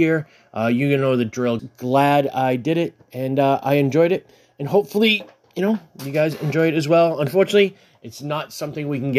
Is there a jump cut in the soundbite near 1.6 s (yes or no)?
yes